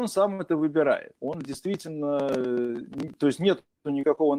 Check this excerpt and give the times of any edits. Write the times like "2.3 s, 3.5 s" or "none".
1.2 s